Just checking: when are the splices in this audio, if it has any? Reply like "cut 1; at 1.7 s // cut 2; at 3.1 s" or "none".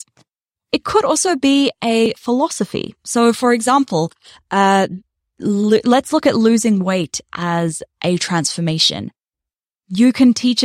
none